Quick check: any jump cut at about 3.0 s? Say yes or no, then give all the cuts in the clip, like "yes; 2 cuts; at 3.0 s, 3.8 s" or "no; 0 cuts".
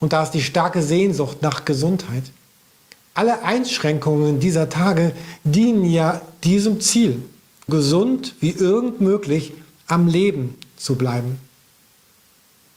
no; 1 cut; at 7.7 s